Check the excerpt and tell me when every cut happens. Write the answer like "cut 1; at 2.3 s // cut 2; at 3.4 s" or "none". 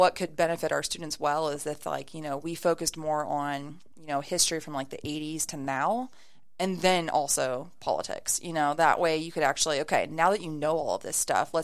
none